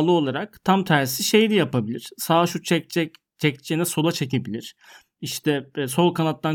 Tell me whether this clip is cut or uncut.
uncut